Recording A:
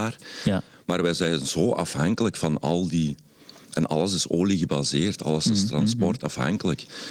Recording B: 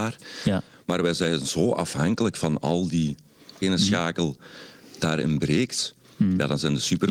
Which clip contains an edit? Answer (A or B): B